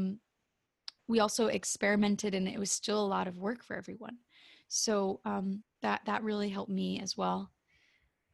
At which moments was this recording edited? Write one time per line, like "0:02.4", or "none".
0:01.0
0:05.6

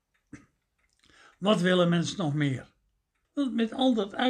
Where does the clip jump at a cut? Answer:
0:03.2

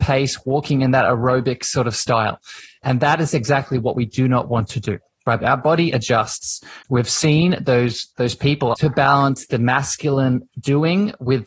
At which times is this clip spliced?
0:05.4
0:06.8
0:08.7

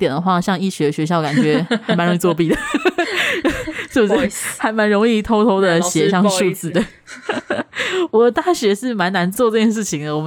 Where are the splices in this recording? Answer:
0:08.1
0:09.3

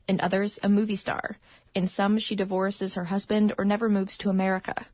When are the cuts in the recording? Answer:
none

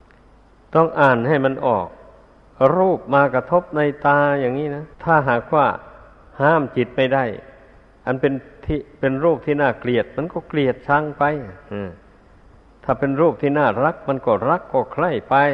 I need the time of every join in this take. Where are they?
0:04.9

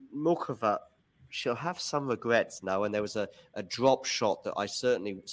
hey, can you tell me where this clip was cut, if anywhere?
none

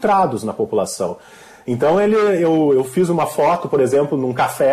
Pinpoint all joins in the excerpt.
none

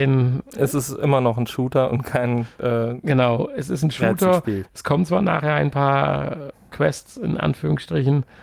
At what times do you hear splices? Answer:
none

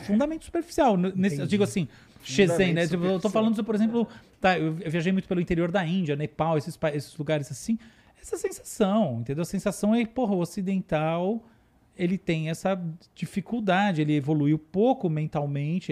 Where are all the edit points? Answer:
0:02.2

